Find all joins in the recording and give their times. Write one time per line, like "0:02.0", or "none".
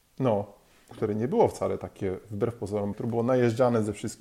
0:00.9
0:02.9